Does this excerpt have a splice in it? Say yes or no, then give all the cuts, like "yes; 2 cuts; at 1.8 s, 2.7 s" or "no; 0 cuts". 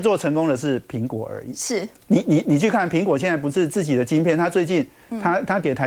no; 0 cuts